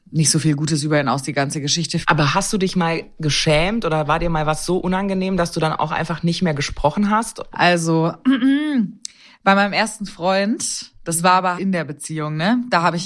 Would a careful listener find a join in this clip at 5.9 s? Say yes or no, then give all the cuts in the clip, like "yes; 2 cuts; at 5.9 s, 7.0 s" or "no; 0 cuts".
no; 3 cuts; at 2.0 s, 7.5 s, 11.6 s